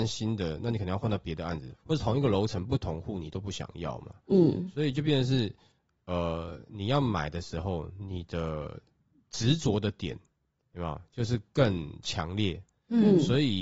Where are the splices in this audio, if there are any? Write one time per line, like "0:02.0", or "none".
0:01.8